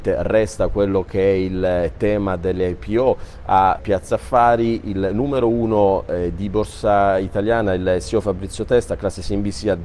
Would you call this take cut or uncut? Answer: cut